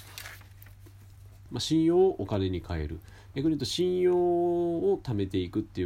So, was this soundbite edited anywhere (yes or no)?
yes